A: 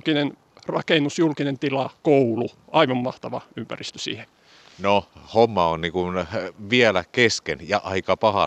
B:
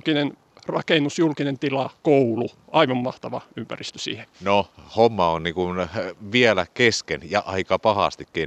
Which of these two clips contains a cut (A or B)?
B